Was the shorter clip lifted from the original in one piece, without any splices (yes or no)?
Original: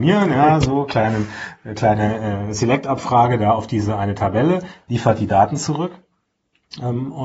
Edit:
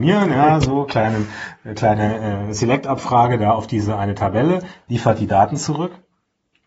yes